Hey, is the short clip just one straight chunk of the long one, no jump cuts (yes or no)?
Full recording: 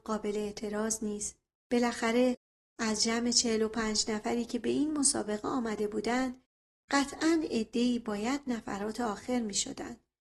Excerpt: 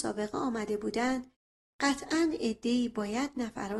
yes